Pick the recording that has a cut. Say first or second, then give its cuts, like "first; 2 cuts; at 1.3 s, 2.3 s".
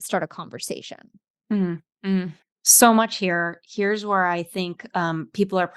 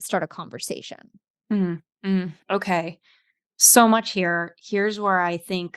first; 1 cut; at 2.4 s